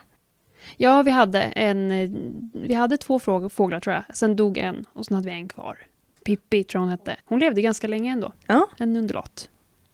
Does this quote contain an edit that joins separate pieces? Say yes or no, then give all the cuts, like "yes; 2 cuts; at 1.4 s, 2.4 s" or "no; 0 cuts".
yes; 1 cut; at 7.2 s